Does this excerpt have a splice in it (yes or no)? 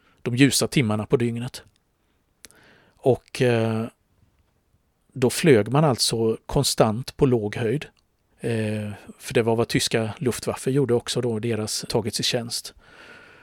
yes